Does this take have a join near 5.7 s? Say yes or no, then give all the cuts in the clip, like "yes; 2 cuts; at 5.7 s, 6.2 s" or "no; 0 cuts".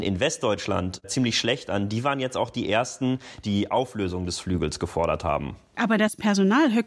no; 1 cut; at 3.4 s